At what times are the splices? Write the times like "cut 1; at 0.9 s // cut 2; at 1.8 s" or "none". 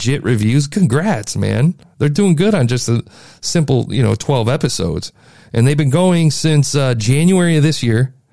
none